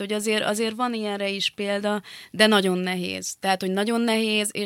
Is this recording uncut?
yes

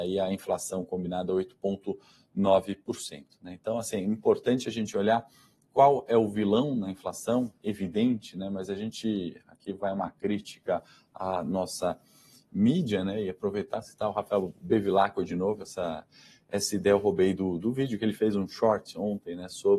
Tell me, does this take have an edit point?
no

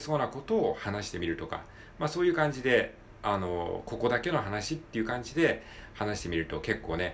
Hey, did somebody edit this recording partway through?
no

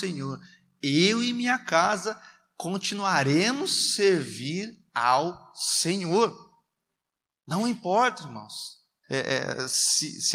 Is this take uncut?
no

